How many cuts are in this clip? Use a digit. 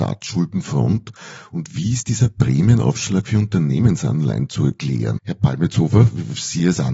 1